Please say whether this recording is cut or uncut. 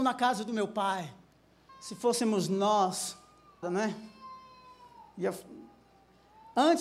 cut